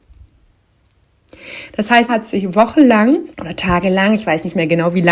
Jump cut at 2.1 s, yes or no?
yes